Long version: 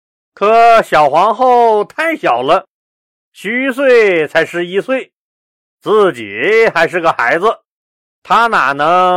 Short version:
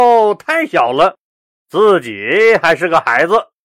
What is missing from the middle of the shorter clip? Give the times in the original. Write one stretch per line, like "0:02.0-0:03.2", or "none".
0:03.1-0:05.7